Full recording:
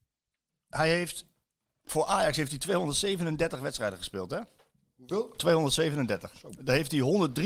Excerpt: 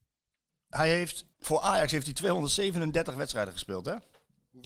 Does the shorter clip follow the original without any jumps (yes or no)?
no